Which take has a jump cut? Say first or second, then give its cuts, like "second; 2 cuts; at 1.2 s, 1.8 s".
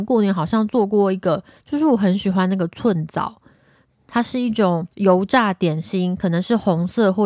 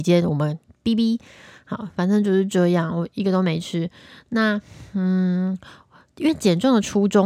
first; 2 cuts; at 1.6 s, 4.9 s